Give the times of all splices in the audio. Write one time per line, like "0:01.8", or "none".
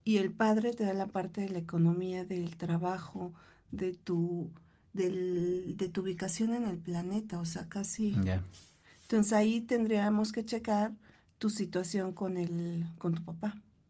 none